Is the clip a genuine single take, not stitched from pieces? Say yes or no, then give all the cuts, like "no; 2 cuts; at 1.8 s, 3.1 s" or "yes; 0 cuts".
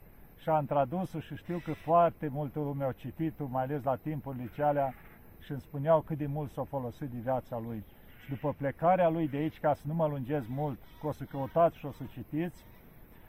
yes; 0 cuts